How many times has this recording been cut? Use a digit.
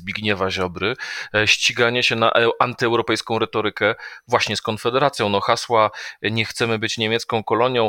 0